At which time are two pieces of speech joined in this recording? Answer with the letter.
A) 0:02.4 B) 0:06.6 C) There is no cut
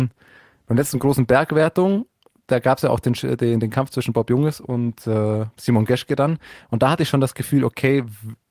C